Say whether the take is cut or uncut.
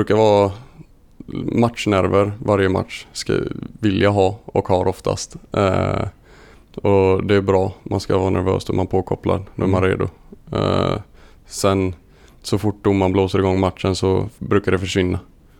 uncut